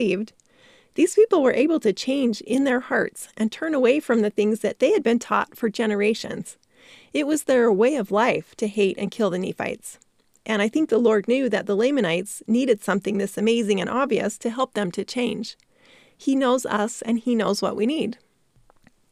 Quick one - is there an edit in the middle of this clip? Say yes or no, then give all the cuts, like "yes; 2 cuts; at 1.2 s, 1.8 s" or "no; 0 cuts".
no; 0 cuts